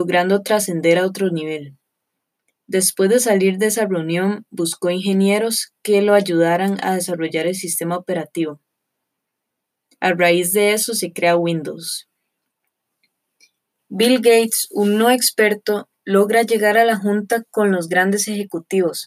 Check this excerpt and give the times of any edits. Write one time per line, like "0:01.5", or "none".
0:13.8